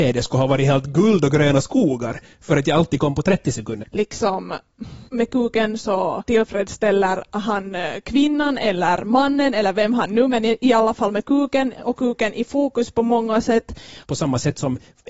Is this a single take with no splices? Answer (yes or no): no